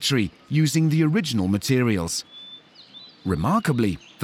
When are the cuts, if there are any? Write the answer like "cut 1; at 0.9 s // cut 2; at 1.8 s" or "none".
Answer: none